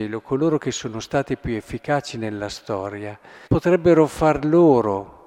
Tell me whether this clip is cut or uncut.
cut